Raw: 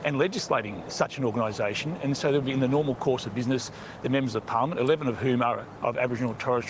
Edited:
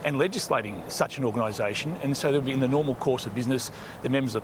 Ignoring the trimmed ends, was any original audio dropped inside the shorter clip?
no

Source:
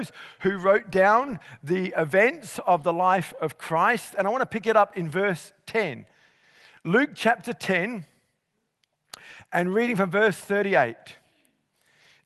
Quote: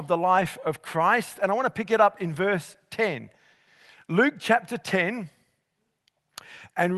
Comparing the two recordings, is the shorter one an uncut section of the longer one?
yes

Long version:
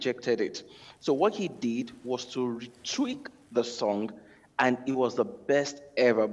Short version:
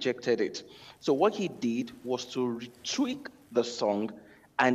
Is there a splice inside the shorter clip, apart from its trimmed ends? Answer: no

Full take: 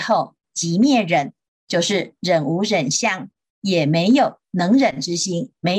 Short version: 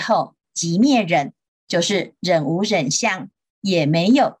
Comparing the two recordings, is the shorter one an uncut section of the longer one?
yes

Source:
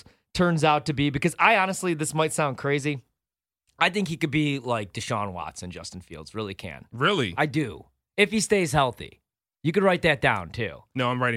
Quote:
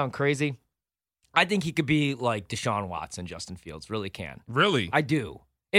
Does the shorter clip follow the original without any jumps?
yes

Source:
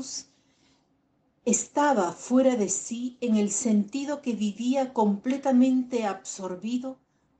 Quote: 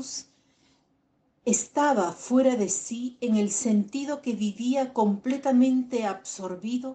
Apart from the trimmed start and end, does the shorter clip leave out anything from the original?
no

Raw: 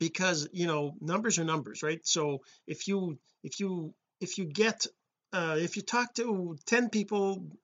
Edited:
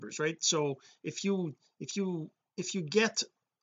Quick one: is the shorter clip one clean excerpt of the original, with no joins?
yes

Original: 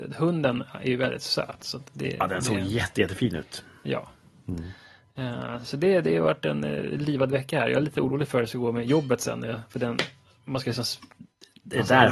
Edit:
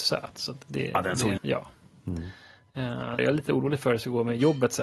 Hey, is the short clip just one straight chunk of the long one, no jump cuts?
no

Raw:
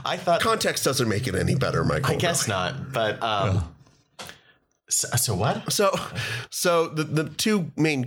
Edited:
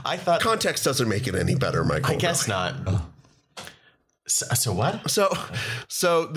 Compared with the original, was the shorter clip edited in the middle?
yes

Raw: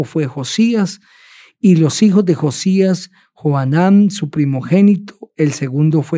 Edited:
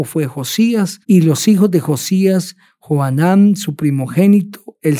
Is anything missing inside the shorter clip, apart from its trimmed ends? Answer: yes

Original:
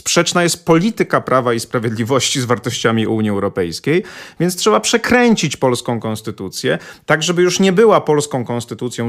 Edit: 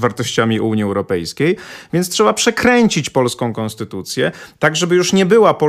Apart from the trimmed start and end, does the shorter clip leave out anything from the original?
no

